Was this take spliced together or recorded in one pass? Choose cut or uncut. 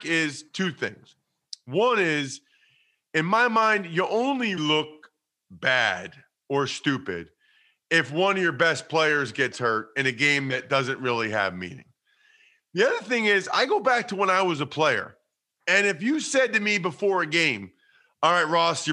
cut